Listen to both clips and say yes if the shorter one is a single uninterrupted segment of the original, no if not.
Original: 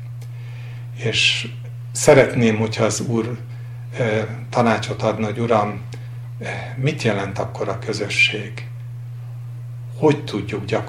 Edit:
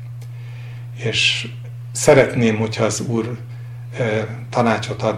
yes